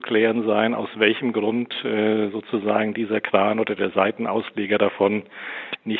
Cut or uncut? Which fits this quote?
uncut